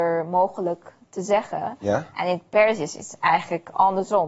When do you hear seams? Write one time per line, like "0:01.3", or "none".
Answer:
none